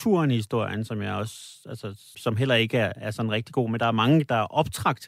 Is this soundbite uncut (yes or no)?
no